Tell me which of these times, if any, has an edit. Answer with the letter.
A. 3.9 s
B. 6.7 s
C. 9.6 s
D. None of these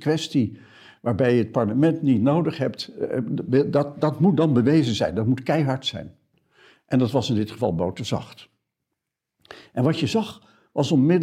D